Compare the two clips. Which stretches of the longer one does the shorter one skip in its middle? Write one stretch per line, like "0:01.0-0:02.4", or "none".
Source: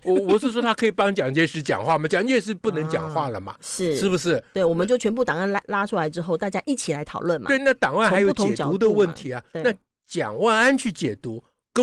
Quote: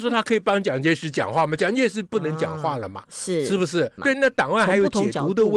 0:04.5-0:07.4